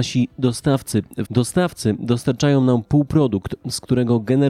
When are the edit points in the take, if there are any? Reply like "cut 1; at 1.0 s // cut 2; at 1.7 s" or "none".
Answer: cut 1; at 1.2 s